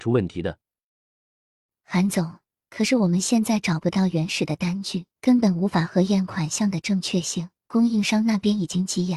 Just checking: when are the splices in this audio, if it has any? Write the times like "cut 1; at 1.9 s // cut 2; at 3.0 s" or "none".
cut 1; at 2.5 s // cut 2; at 5.1 s // cut 3; at 7.6 s